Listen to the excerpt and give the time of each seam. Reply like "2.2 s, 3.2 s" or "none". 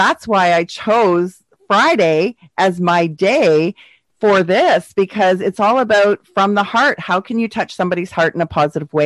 none